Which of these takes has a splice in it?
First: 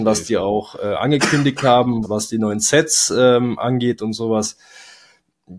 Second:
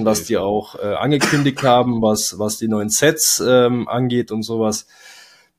first; 1 cut; at 2.0 s

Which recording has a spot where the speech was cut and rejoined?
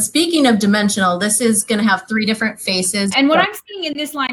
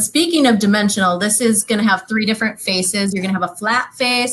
first; 1 cut; at 3.1 s

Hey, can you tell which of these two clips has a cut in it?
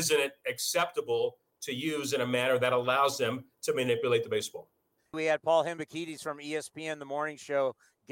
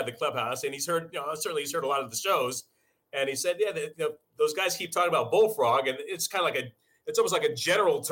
first; 1 cut; at 5.1 s

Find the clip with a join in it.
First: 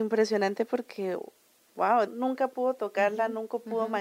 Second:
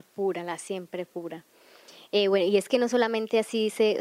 first; 1 cut; at 2.1 s

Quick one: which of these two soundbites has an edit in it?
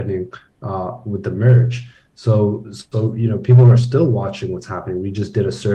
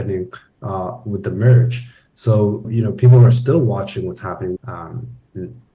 second; 2 cuts; at 2.6 s, 4.6 s

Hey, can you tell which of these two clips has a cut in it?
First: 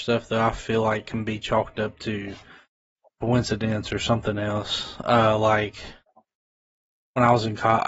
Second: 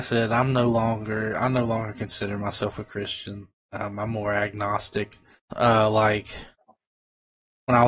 second; 1 cut; at 5.5 s

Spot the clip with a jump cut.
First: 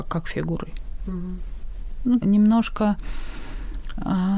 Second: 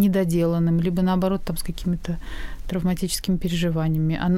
first; 1 cut; at 2.2 s

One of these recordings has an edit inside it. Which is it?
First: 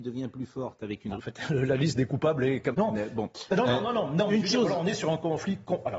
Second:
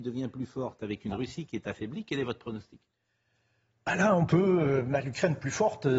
first; 2 cuts; at 1.2 s, 2.7 s

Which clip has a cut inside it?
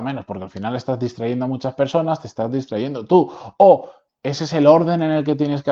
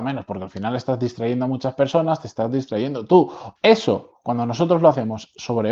second; 1 cut; at 3.6 s

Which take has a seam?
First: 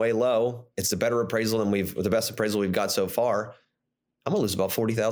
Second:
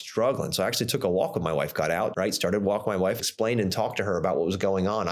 second; 2 cuts; at 2.1 s, 3.2 s

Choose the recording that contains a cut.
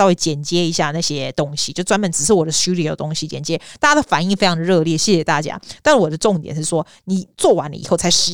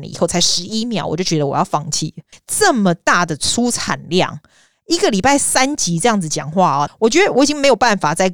second; 2 cuts; at 2.3 s, 6.9 s

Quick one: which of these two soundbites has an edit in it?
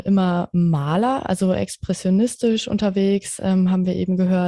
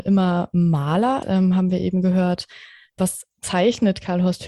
second; 1 cut; at 1.2 s

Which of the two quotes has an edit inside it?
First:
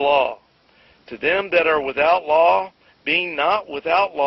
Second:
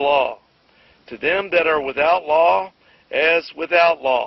first; 1 cut; at 2.9 s

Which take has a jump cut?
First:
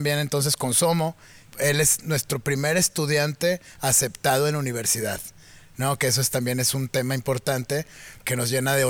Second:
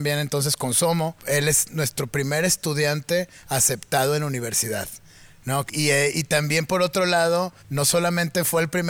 second; 3 cuts; at 1.2 s, 5.7 s, 7.6 s

